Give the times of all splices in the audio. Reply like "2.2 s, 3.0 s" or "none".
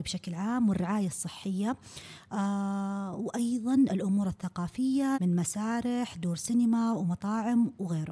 5.1 s